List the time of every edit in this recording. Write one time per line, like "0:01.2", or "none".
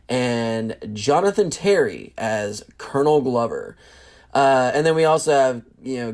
none